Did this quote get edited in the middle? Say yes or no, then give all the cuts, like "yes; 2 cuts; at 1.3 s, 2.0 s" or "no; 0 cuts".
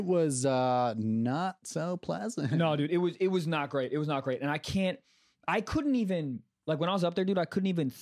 no; 0 cuts